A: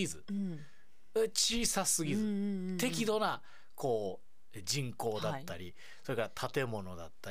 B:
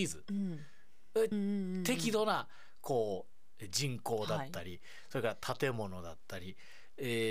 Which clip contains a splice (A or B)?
B